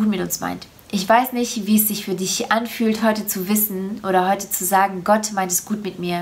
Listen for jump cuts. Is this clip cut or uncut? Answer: uncut